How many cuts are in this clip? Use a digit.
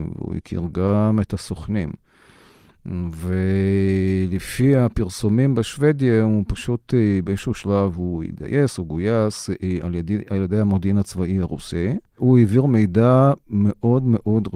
0